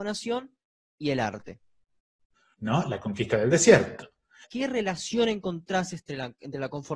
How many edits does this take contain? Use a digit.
2